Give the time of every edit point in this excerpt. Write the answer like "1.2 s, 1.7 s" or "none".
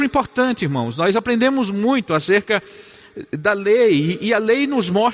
none